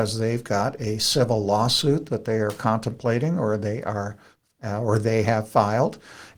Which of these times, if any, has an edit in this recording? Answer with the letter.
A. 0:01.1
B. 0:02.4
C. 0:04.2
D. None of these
D